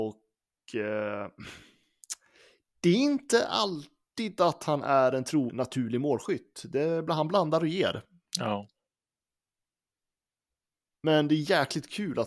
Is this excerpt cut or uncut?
cut